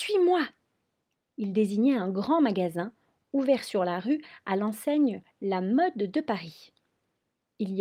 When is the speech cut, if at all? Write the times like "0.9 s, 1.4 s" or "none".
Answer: none